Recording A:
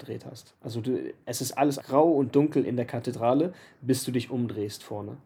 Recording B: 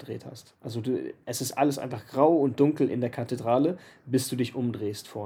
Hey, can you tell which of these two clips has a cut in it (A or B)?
A